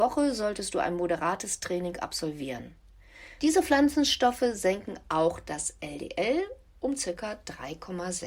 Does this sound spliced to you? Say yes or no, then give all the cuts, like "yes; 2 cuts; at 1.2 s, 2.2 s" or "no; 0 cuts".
yes; 1 cut; at 3.4 s